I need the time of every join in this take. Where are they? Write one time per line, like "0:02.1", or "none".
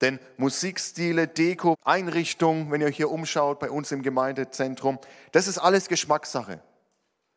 0:01.7